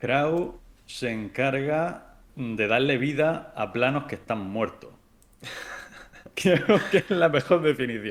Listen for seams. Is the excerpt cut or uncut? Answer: uncut